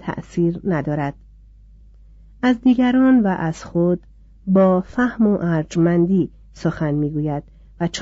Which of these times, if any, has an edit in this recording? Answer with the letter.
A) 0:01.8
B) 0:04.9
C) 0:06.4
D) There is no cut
D